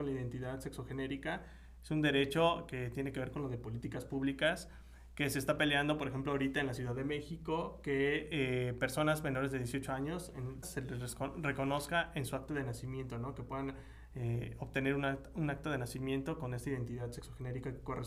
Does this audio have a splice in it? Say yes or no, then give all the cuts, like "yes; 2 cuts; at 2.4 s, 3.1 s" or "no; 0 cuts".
yes; 1 cut; at 10.6 s